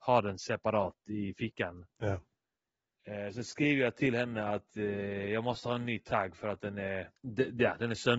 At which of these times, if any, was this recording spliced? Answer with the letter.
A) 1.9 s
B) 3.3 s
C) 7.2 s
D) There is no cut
C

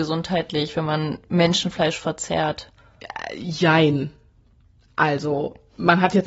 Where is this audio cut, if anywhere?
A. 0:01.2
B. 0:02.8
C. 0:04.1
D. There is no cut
D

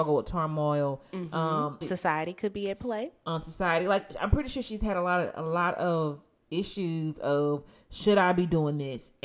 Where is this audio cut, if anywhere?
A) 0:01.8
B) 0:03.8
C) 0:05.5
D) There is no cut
A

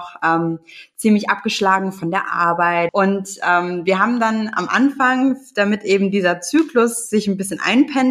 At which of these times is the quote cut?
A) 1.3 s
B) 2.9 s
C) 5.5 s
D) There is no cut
B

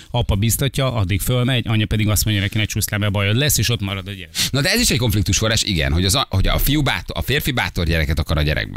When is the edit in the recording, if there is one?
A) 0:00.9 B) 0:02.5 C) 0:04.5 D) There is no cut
D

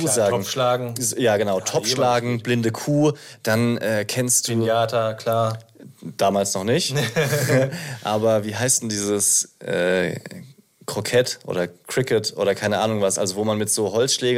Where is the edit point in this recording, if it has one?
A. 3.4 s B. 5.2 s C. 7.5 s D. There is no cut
D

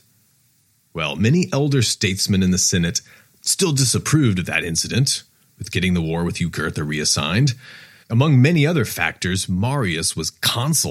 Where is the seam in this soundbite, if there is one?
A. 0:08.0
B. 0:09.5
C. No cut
A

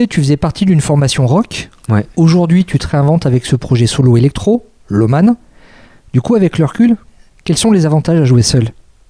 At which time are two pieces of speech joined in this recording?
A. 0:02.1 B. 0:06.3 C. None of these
C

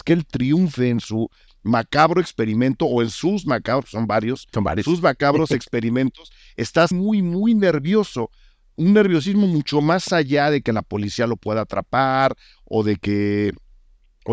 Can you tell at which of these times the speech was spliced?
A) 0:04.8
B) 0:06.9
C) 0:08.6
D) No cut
B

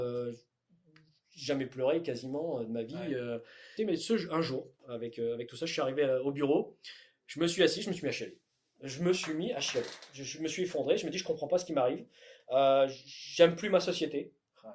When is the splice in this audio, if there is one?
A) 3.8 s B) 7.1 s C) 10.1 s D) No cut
A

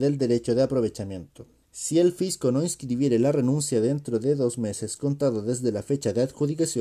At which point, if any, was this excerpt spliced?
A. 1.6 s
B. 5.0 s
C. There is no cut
A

